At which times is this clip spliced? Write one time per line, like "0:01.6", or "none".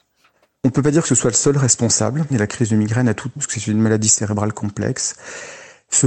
0:02.3
0:03.4